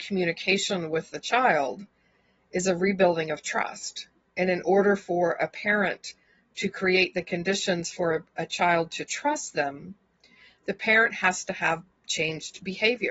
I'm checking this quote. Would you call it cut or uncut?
uncut